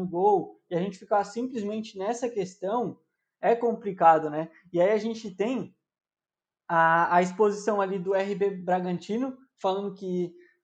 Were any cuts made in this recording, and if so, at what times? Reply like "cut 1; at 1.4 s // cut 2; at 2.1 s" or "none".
none